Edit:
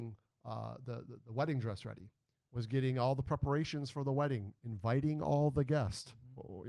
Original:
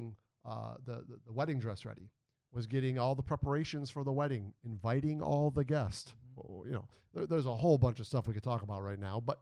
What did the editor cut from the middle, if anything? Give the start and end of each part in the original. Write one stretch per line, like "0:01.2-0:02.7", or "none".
none